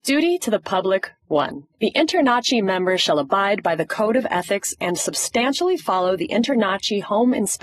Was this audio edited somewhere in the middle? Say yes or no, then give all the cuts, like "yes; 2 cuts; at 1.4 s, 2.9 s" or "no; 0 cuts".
no; 0 cuts